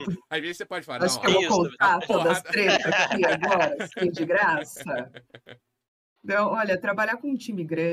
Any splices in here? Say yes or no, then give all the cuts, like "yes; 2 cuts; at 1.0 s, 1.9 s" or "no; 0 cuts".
no; 0 cuts